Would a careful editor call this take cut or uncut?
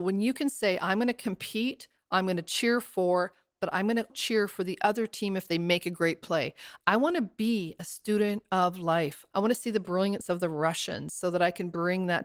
cut